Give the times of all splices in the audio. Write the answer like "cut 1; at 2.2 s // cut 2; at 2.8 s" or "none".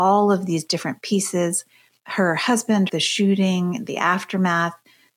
cut 1; at 2.9 s